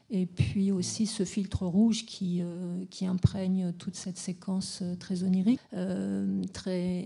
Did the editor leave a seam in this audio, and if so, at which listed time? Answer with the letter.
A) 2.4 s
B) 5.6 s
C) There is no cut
B